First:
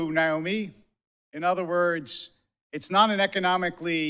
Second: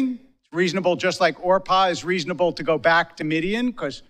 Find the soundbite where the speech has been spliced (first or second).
first